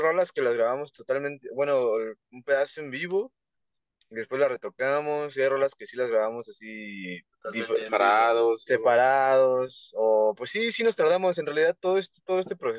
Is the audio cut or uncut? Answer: uncut